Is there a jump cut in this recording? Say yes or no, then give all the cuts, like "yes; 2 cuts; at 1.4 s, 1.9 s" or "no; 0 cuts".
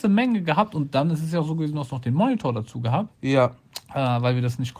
yes; 1 cut; at 3.1 s